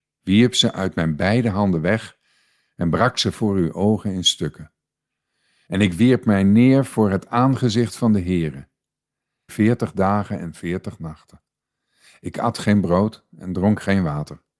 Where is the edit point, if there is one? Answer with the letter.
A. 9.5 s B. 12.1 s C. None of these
A